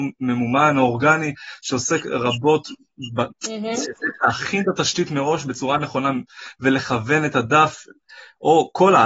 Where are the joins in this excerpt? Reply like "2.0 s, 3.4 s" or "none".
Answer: 3.3 s